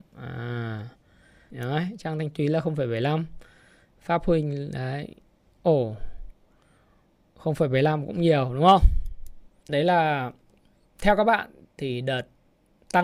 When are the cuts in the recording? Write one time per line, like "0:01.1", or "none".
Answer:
0:01.5
0:09.6